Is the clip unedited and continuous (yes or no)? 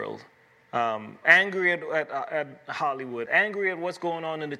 no